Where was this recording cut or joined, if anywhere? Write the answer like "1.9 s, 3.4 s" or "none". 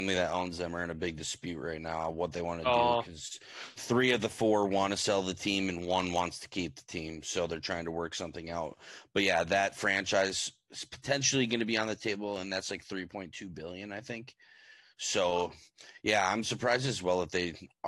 none

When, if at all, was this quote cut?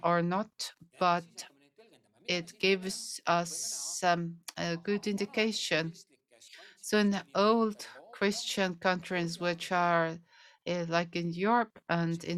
none

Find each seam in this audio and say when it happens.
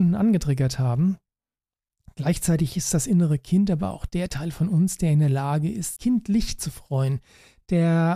6.0 s

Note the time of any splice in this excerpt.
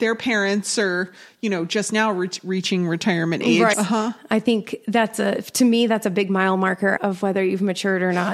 3.7 s, 7.0 s

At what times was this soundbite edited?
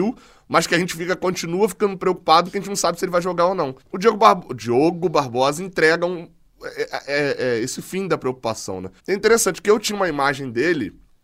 3.8 s, 9.0 s

